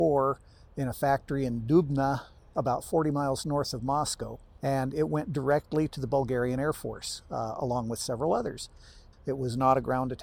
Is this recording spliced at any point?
yes; 1 cut; at 9.1 s

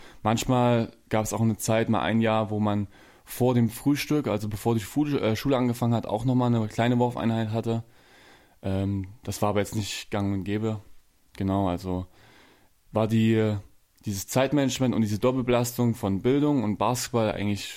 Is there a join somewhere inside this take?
no; 0 cuts

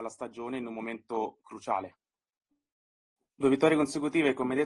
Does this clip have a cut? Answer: yes; 1 cut; at 3.2 s

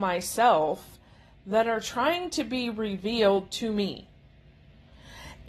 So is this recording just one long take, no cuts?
yes; 0 cuts

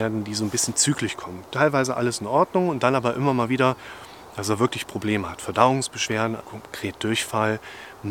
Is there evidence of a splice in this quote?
yes; 1 cut; at 6.4 s

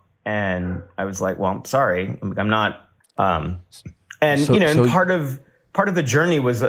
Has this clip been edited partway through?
yes; 1 cut; at 3.0 s

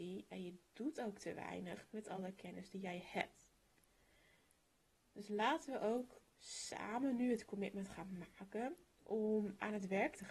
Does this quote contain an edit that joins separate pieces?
no; 0 cuts

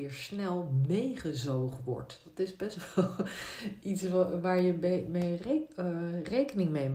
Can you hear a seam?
no; 0 cuts

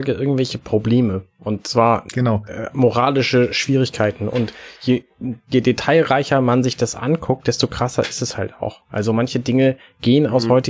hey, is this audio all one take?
yes; 0 cuts

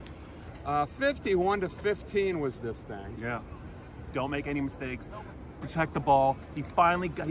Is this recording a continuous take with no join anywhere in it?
no; 1 cut; at 4.1 s

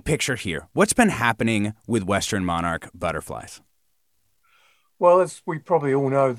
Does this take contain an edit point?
no; 0 cuts

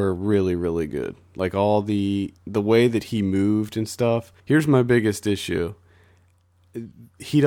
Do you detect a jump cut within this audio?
yes; 2 cuts; at 2.4 s, 4.4 s

